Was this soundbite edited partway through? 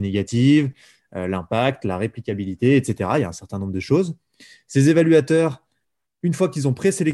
no; 0 cuts

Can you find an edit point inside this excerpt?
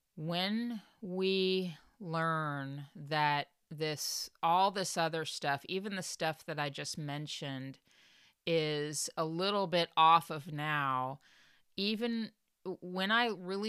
no; 0 cuts

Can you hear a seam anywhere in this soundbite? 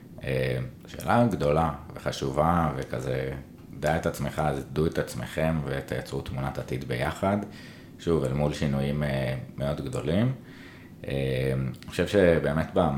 no; 0 cuts

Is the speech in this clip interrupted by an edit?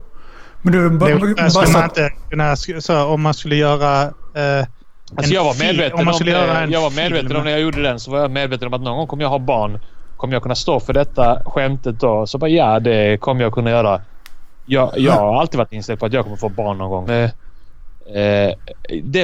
yes; 1 cut; at 17.1 s

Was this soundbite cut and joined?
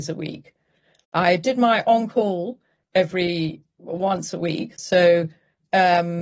yes; 1 cut; at 4.8 s

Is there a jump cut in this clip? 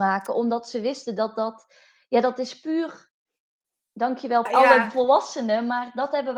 yes; 1 cut; at 4.5 s

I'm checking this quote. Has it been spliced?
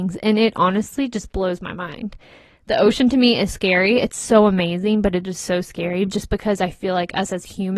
yes; 1 cut; at 3.5 s

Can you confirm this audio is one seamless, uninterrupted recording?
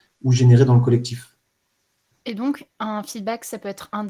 no; 1 cut; at 2.1 s

